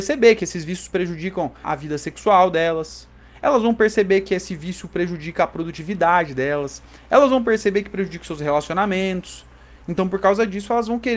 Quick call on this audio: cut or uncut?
cut